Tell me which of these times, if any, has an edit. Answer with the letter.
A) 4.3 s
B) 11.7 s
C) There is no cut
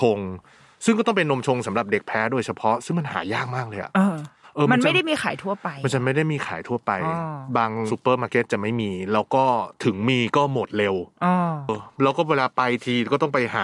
B